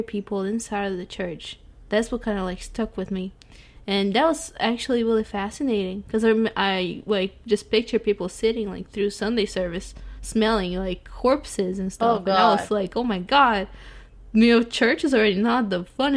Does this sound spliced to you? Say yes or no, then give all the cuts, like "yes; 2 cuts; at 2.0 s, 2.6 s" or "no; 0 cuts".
no; 0 cuts